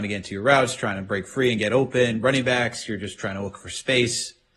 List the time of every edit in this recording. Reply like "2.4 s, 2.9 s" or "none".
none